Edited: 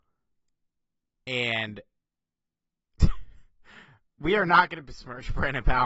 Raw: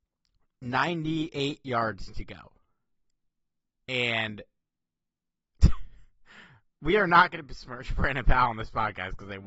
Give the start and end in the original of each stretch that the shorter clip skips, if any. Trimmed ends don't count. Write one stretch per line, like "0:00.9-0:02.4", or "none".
none